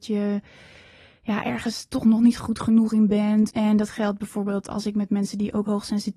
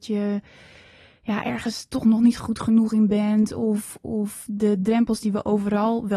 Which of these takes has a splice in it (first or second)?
first